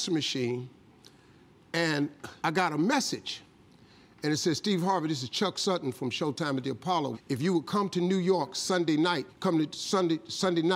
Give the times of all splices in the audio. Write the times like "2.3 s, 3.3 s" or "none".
2.4 s, 7.1 s, 9.3 s